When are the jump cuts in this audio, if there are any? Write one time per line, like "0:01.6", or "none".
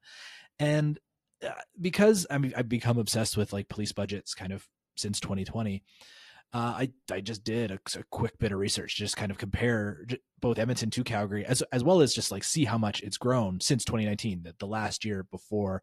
none